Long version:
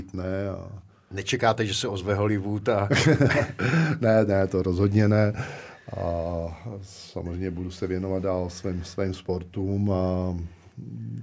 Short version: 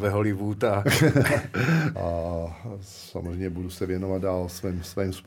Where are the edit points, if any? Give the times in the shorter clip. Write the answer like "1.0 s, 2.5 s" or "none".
1.9 s

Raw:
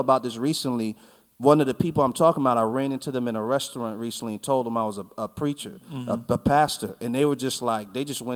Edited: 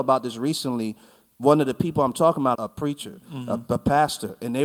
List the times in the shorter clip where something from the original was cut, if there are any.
2.5 s

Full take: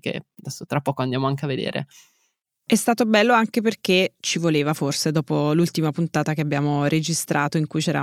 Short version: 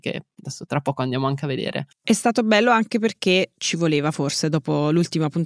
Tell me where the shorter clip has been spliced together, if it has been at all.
1.9 s

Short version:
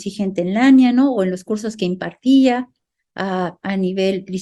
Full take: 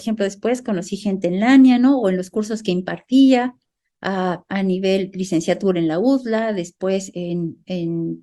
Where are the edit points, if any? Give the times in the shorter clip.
none

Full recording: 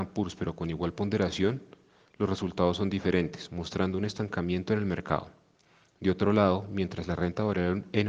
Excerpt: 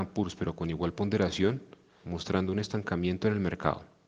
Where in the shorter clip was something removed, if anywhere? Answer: 2.0 s

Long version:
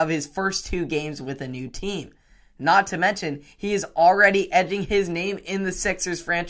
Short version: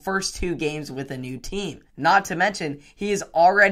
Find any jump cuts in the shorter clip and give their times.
1.9 s

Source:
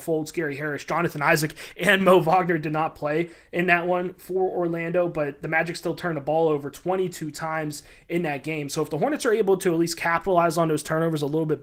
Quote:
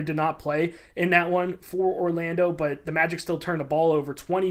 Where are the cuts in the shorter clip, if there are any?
none

